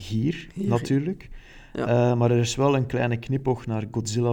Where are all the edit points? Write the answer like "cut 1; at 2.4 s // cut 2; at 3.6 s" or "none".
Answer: none